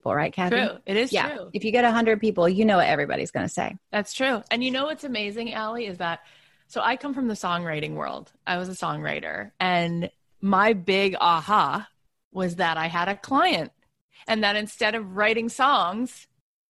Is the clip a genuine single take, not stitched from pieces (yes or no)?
yes